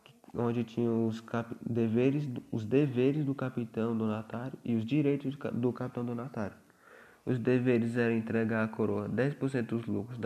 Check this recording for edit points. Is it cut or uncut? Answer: uncut